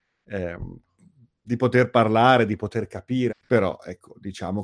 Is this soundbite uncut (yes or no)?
no